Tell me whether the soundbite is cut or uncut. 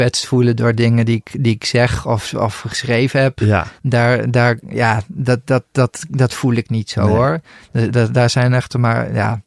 uncut